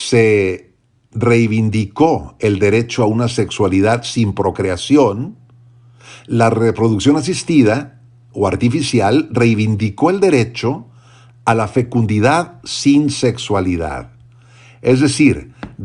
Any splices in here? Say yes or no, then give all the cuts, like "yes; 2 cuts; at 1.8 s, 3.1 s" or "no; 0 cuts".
no; 0 cuts